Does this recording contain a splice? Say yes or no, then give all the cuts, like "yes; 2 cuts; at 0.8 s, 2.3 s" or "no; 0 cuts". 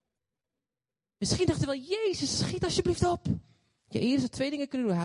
yes; 1 cut; at 3.8 s